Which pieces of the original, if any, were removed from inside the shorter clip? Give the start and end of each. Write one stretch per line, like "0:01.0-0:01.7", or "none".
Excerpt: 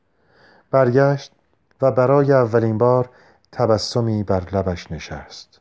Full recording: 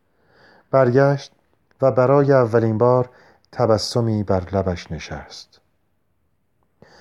none